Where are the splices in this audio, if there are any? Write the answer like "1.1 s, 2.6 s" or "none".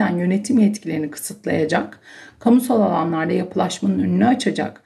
none